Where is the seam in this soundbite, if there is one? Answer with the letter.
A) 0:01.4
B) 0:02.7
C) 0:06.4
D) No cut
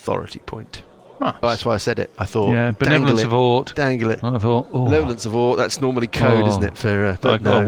A